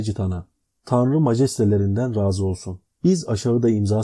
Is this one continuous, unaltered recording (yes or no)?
yes